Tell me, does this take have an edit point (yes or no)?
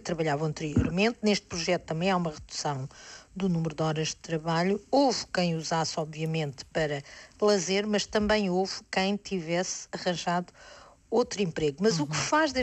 no